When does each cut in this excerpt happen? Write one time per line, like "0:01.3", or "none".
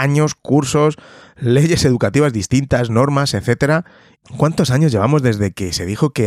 0:04.2